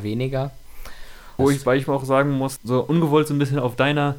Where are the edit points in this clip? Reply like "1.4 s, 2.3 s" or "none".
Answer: 1.4 s, 2.6 s